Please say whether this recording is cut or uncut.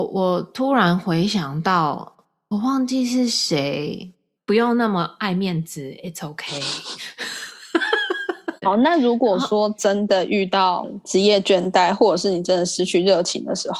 cut